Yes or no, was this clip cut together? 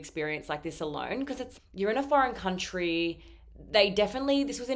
yes